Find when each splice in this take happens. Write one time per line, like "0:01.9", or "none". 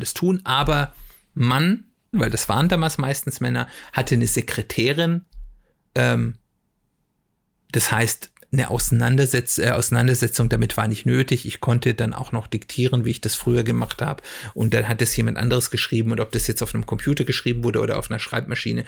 0:02.1